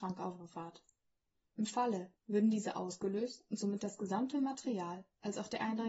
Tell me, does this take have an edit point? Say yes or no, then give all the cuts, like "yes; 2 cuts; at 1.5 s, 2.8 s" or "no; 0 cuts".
yes; 1 cut; at 2.1 s